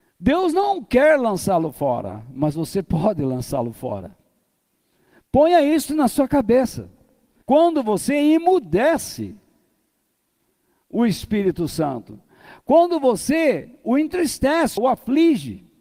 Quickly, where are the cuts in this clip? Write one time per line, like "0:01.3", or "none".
0:07.4
0:14.8